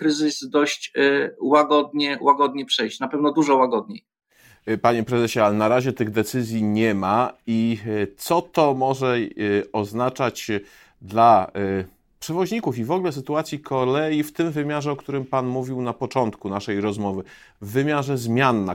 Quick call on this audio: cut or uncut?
uncut